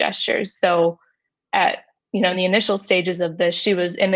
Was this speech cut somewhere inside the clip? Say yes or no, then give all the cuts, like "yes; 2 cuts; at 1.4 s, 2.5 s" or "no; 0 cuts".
no; 0 cuts